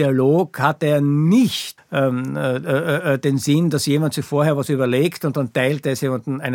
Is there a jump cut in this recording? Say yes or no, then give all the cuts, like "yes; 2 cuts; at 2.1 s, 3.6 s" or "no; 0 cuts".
yes; 1 cut; at 1.8 s